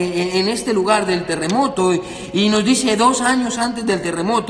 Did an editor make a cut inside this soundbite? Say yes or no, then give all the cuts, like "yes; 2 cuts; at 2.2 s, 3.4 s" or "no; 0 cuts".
no; 0 cuts